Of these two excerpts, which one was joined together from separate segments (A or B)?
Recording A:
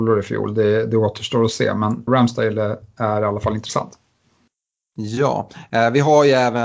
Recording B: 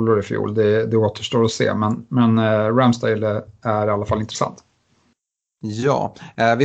A